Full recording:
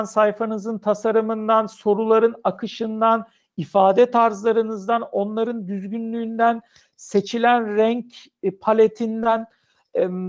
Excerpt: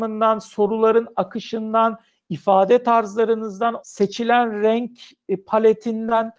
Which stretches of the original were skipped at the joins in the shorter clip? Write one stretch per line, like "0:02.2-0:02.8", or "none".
0:05.1-0:06.9